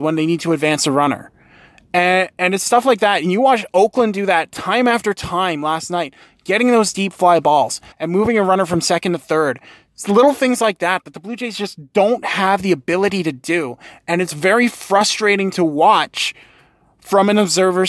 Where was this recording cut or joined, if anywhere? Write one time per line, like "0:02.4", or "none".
0:07.9

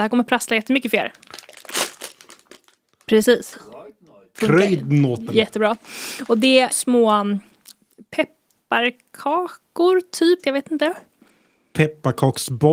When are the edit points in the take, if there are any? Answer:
0:04.4
0:06.7
0:10.4

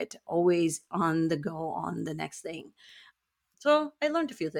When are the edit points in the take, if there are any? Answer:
none

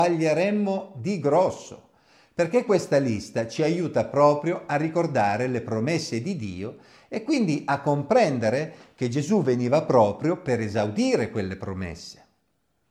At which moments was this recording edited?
none

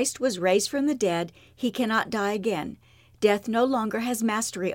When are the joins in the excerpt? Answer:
none

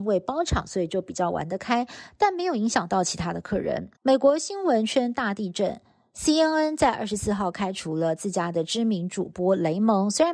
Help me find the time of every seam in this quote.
0:04.0

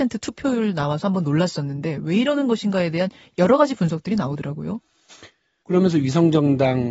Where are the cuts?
0:05.6

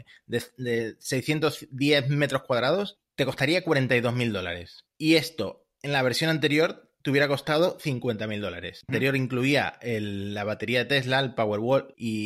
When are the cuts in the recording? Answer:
0:08.9

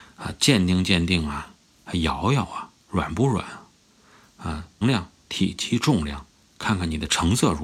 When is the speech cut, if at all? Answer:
0:04.8

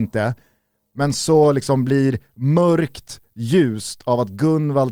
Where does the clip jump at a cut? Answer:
none

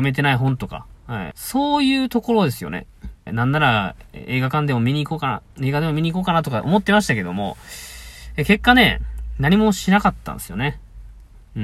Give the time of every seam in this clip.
0:01.3
0:03.3

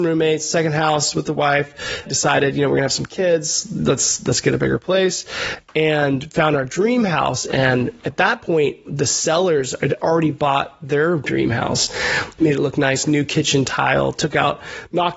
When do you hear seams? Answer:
0:02.1
0:12.4

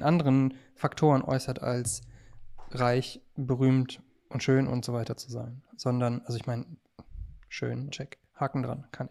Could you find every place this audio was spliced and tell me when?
0:05.7
0:07.9

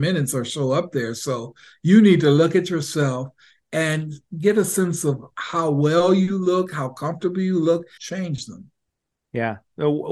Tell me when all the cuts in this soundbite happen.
0:08.0

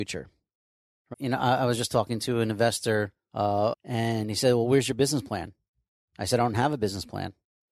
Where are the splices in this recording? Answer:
0:01.1
0:03.7

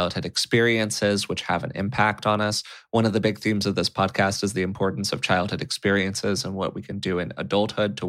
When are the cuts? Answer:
none

